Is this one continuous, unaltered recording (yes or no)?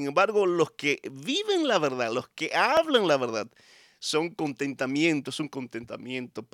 yes